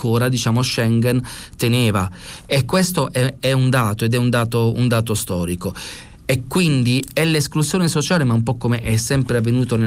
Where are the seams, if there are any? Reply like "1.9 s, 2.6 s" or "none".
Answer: none